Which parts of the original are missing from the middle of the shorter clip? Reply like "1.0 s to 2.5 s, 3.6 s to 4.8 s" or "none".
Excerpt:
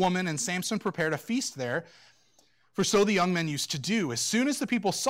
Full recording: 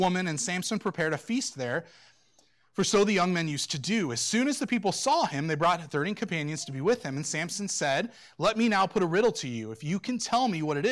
none